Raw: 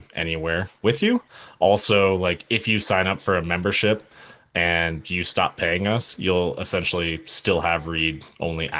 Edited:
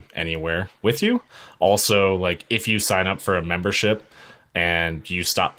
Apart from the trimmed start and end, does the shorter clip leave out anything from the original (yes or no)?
no